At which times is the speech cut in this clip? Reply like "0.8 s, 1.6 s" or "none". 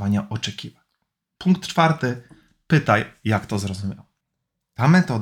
1.4 s